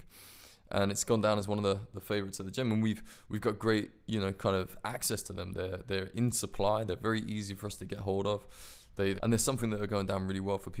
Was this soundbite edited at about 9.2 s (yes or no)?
yes